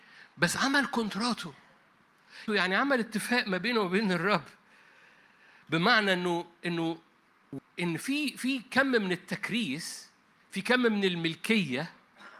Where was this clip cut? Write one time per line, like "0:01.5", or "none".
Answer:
0:02.5